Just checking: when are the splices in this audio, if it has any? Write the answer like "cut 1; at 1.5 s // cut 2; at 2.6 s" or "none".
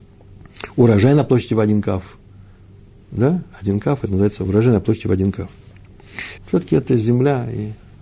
cut 1; at 6.4 s